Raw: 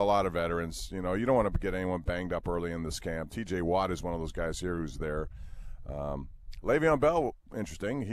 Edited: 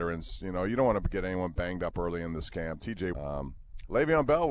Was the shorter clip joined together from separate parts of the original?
yes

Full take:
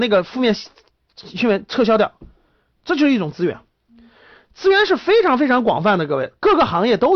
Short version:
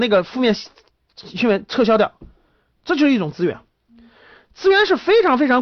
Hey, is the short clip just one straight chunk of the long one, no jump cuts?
yes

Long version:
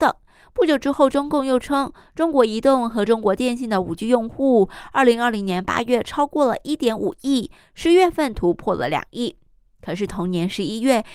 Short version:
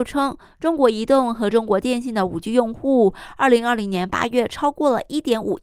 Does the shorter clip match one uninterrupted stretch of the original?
yes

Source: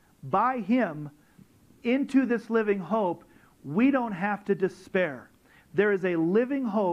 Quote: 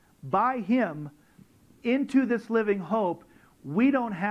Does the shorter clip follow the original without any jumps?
yes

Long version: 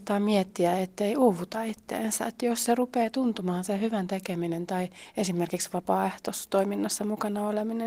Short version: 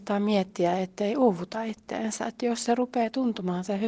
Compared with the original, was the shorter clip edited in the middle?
no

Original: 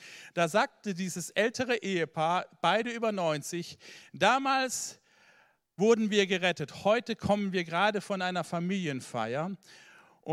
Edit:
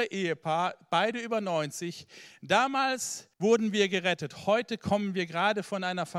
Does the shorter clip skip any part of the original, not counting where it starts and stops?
yes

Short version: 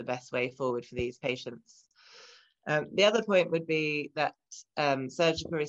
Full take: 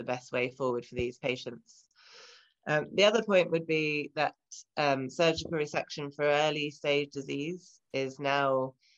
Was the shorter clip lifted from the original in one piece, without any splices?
yes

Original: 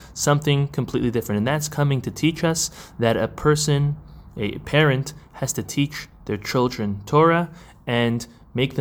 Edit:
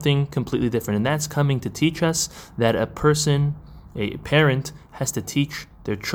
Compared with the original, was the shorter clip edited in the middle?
no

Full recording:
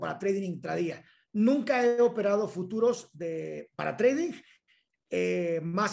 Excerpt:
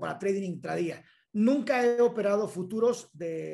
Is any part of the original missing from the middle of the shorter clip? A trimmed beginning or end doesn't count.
no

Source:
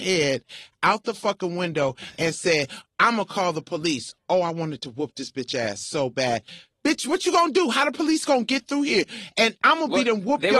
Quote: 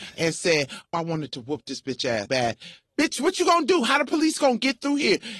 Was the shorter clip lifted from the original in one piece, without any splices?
no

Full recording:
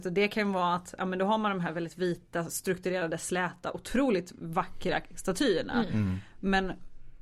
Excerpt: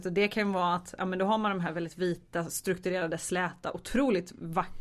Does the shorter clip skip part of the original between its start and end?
no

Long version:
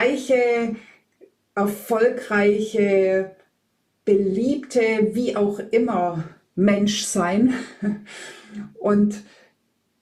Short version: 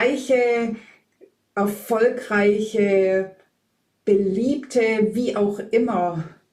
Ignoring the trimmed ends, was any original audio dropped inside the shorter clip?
no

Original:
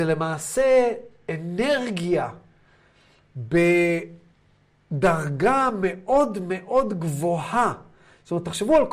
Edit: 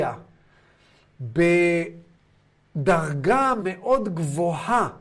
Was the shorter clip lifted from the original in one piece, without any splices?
no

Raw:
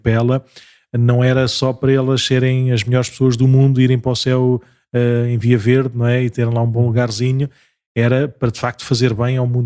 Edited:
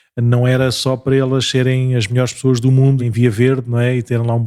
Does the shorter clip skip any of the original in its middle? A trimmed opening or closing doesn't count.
yes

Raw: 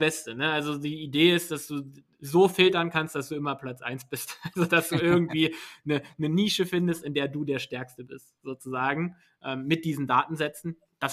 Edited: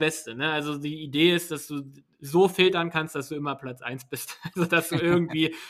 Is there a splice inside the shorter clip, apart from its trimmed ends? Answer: no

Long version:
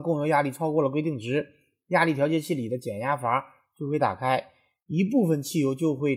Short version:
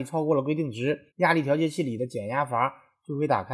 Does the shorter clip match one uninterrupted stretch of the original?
no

